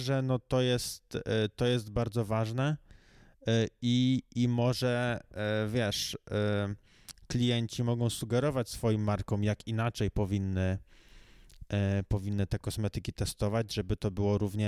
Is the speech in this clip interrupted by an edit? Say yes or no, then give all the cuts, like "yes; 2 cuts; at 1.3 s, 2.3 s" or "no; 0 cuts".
no; 0 cuts